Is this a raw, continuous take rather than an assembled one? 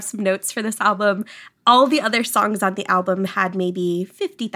yes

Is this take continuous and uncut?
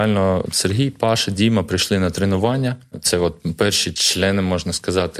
yes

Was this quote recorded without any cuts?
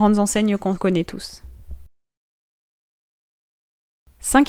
yes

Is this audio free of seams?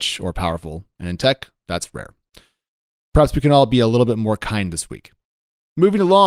yes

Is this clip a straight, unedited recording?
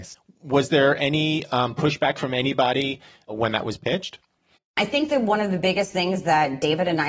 yes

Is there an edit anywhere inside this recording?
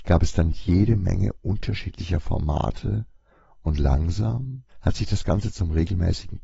yes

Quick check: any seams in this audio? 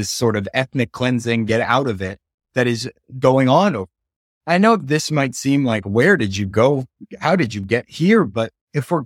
yes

